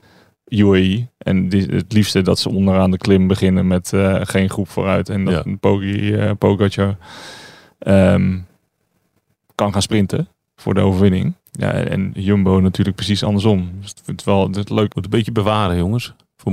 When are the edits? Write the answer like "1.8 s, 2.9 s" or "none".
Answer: 11.4 s, 14.9 s